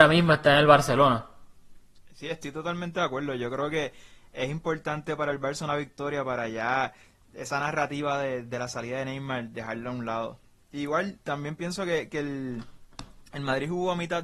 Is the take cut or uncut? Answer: uncut